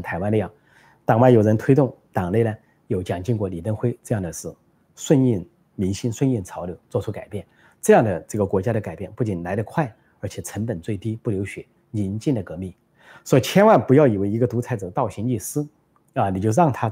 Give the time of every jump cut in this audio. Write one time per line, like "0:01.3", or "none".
none